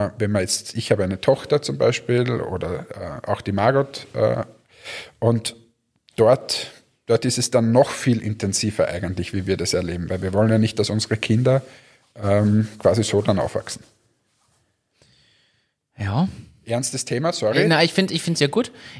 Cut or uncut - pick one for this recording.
uncut